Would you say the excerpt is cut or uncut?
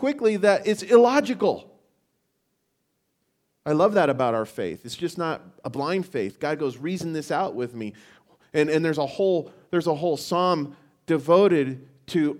uncut